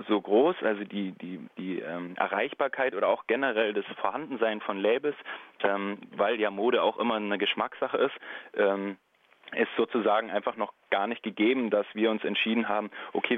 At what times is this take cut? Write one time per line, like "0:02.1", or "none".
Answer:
none